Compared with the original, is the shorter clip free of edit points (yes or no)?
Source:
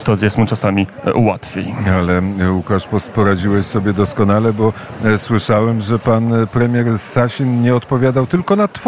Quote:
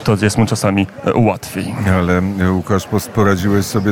yes